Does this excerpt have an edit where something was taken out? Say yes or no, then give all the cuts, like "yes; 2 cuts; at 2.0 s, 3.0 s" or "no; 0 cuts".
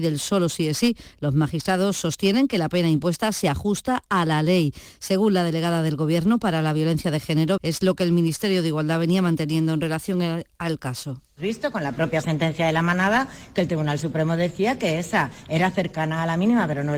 yes; 1 cut; at 7.6 s